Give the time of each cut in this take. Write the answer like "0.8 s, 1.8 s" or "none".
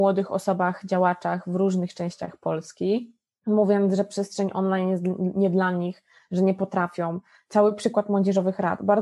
none